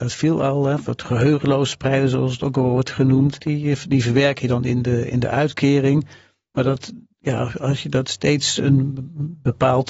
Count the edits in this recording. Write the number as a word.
one